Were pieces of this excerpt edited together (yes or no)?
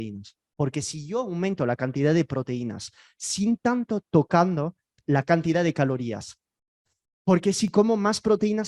yes